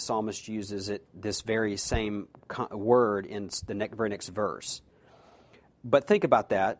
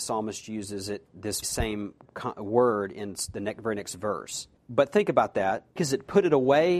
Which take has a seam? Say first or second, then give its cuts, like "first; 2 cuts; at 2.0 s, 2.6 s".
second; 3 cuts; at 1.4 s, 4.6 s, 5.8 s